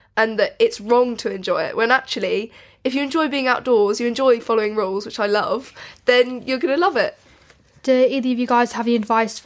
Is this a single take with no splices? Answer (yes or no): yes